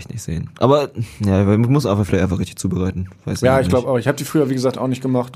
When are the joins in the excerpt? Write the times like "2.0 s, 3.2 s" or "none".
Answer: none